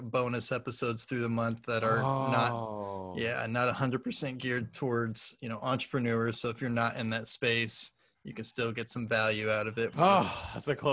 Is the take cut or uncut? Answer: uncut